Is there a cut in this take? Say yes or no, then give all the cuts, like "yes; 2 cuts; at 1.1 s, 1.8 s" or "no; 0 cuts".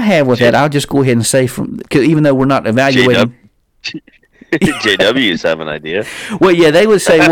yes; 1 cut; at 1.8 s